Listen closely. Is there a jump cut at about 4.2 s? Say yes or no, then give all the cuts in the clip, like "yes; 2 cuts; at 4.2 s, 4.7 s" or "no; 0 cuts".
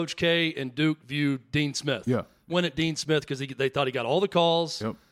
no; 1 cut; at 2.5 s